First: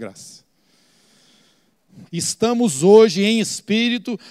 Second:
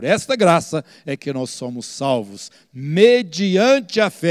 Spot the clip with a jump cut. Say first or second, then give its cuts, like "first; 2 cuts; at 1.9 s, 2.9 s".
first; 1 cut; at 2.1 s